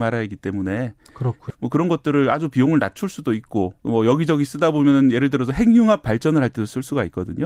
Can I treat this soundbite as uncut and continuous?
no; 2 cuts; at 1.5 s, 3.8 s

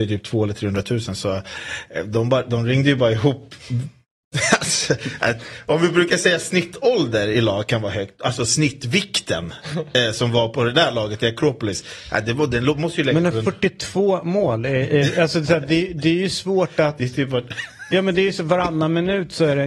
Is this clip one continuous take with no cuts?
yes; 0 cuts

